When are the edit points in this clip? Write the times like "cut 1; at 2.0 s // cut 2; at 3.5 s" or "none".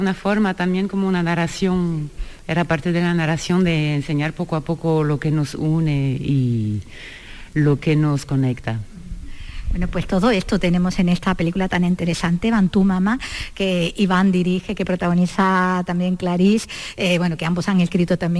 none